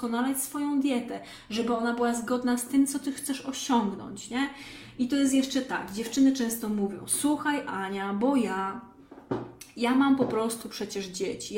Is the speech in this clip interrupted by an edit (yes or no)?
no